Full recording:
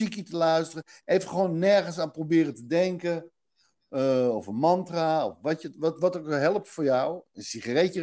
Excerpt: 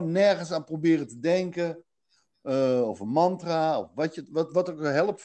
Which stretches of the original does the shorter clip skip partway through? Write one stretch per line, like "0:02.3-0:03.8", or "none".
none

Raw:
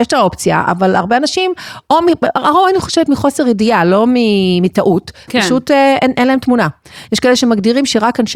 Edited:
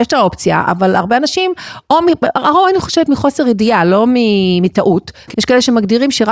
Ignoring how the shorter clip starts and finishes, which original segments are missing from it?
0:05.3-0:07.1

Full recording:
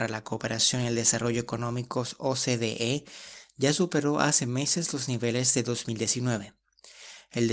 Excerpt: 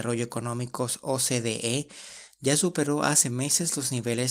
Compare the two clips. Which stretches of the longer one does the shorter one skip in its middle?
none

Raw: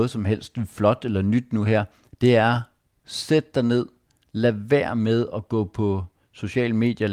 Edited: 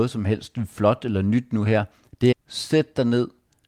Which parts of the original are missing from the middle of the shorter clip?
0:02.3-0:02.9

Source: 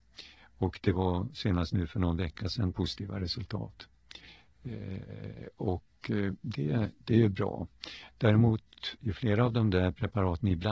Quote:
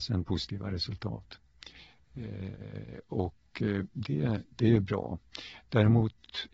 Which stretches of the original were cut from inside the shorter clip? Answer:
none

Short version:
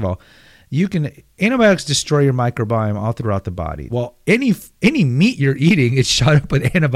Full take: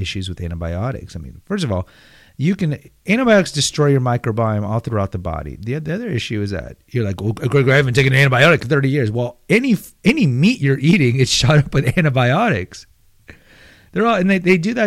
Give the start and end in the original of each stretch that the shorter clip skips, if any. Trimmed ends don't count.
0:05.6-0:09.1

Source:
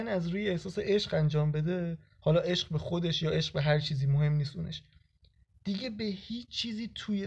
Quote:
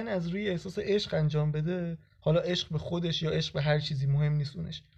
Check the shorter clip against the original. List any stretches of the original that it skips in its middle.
none

